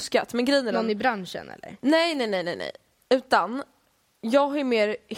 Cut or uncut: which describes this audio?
uncut